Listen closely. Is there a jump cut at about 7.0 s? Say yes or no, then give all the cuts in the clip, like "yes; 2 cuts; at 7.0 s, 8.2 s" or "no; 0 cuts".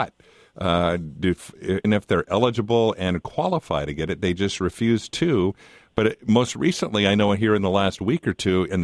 no; 1 cut; at 1.8 s